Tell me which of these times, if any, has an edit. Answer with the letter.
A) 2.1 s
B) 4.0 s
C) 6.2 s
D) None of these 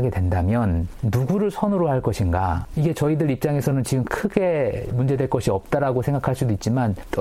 B